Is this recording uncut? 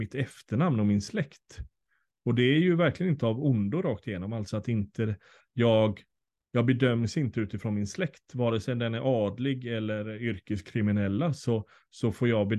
yes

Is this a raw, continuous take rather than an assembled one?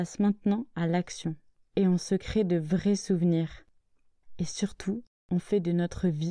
yes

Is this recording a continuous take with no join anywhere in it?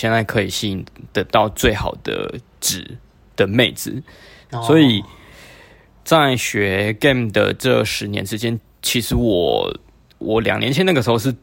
no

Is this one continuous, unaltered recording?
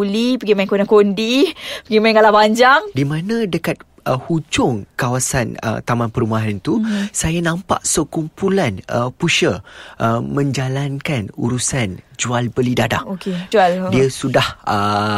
no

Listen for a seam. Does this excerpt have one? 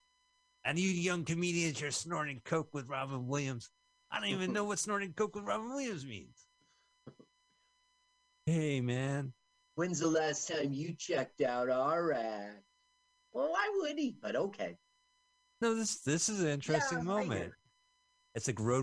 no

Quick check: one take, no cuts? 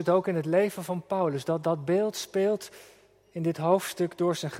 yes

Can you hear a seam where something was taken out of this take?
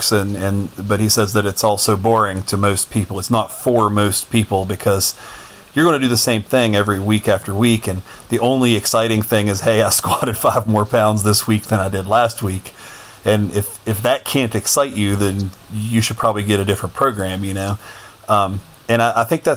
no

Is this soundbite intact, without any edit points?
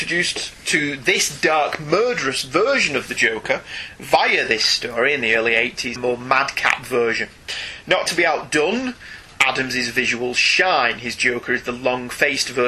no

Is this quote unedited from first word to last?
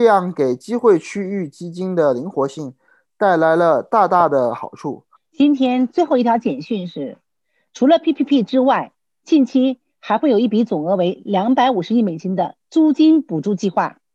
no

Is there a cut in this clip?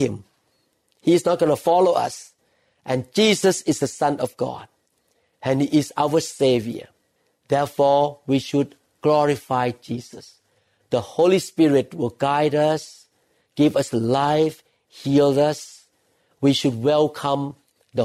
no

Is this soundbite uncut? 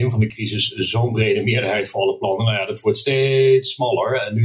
yes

